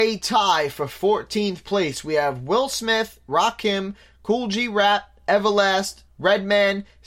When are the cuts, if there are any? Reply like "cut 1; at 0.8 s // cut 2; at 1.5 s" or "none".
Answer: cut 1; at 6.1 s